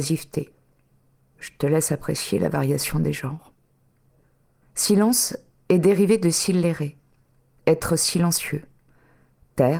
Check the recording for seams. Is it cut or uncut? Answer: uncut